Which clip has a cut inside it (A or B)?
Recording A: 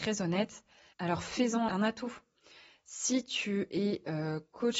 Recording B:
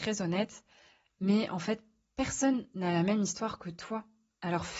A